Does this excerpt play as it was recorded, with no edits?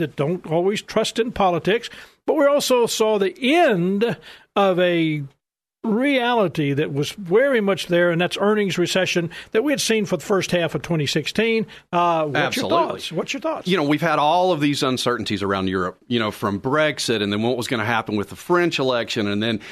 no; 1 cut; at 11.9 s

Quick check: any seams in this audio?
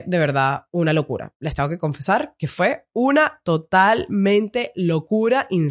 no; 0 cuts

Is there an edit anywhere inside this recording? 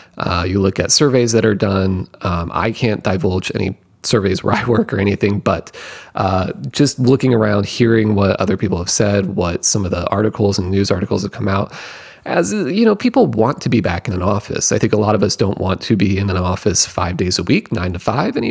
no; 0 cuts

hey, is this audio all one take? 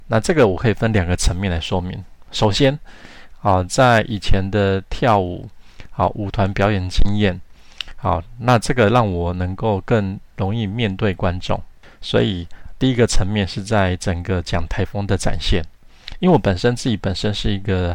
no; 1 cut; at 14.7 s

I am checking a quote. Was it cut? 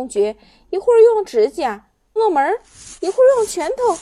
yes; 1 cut; at 2.2 s

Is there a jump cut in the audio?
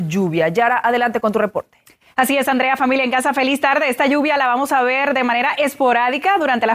no; 0 cuts

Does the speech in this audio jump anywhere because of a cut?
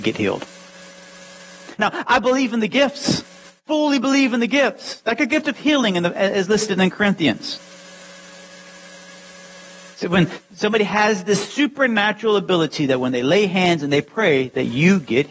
yes; 1 cut; at 1.8 s

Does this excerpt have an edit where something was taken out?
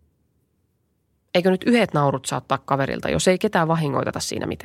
yes; 1 cut; at 1.3 s

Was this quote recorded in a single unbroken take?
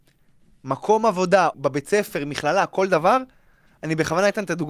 no; 1 cut; at 1.5 s

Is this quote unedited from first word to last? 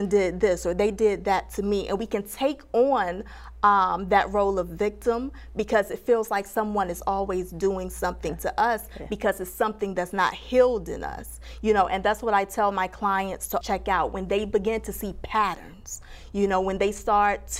no; 1 cut; at 13.6 s

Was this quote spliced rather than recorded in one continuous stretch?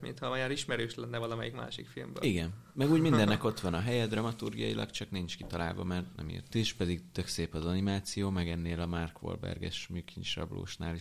yes; 1 cut; at 6.5 s

